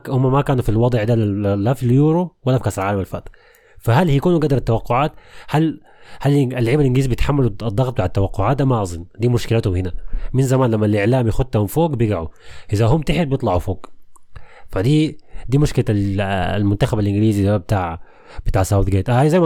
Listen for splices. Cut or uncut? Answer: uncut